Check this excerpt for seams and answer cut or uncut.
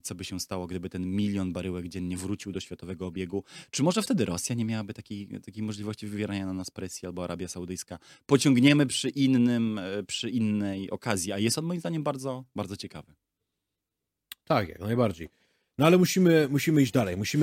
uncut